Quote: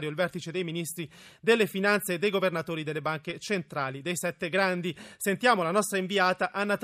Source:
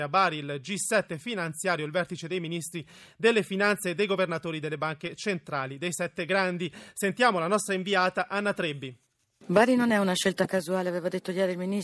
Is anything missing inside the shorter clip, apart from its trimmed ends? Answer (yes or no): no